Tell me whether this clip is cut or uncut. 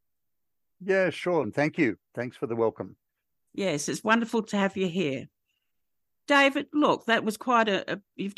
cut